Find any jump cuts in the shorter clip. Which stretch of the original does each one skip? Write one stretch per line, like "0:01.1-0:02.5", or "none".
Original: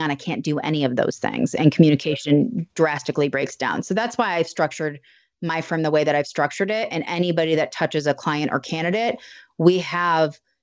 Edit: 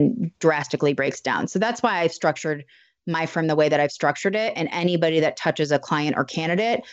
none

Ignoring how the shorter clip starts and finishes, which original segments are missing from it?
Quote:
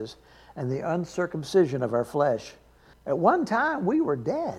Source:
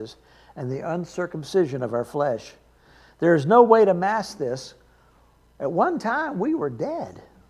0:02.9-0:05.5

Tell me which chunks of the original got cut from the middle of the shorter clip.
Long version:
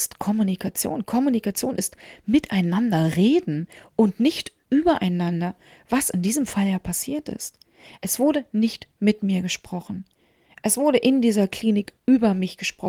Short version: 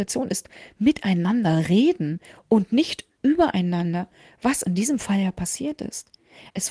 none

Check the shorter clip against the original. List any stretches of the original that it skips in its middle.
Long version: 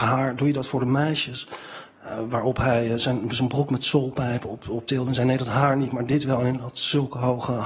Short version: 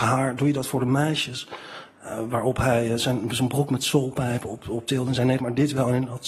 0:05.4-0:05.9

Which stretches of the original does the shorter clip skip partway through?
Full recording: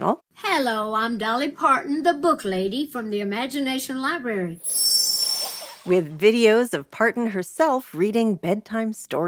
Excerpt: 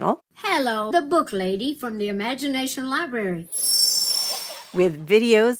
0:00.9-0:02.0

